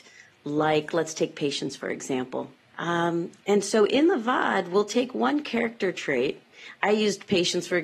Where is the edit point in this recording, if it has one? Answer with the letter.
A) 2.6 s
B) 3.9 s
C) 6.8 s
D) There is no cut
A